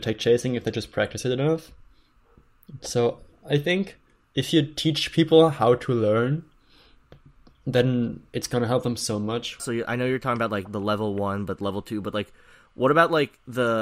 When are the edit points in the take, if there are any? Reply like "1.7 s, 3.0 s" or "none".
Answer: 9.6 s

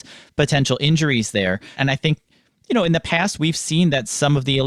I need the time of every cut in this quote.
1.7 s

